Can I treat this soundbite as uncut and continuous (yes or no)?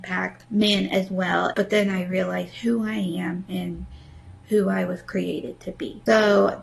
no